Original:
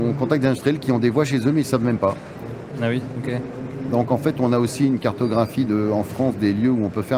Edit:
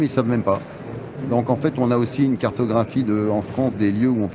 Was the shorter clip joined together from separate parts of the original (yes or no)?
yes